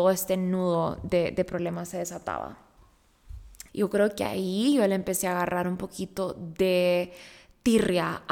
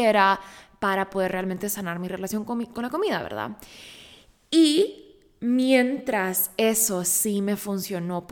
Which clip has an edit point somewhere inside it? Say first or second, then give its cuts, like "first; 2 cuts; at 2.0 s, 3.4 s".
first; 1 cut; at 3.7 s